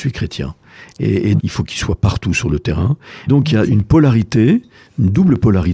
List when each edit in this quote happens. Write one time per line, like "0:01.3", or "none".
0:01.4
0:03.3

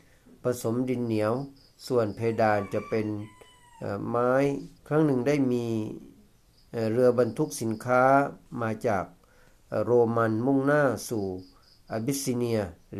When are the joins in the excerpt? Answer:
0:04.8

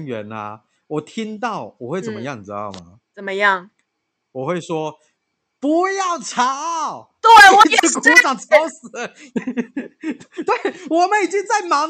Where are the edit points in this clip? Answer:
none

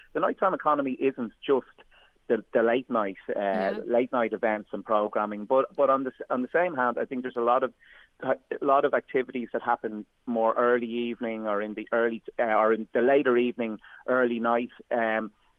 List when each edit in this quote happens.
none

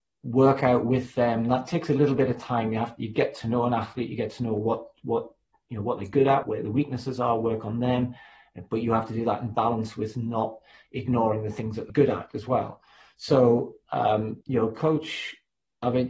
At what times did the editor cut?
0:06.4
0:11.9
0:14.4

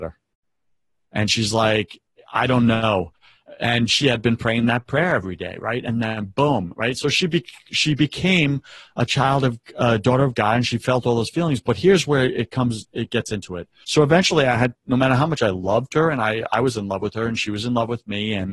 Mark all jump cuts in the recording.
0:13.8

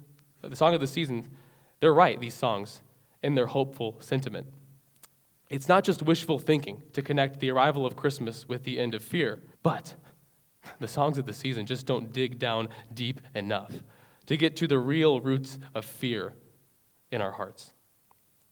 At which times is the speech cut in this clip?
0:09.5

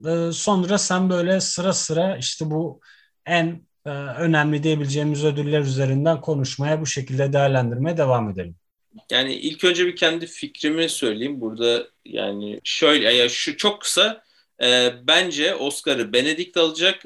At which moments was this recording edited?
0:12.6

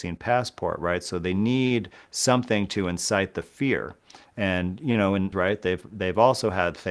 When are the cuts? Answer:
0:05.3

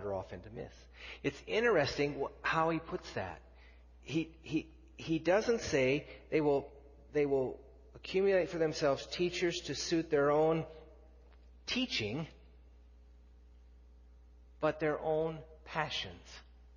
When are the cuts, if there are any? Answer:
none

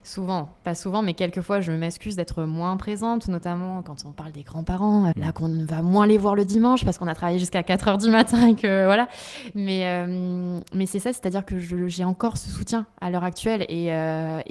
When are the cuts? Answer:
0:05.1

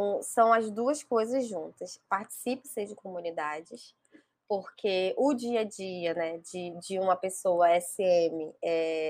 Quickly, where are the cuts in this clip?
none

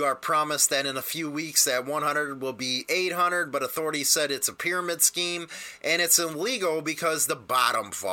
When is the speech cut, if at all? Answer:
none

